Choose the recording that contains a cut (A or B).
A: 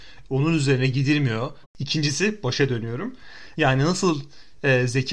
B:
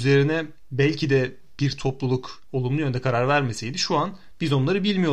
A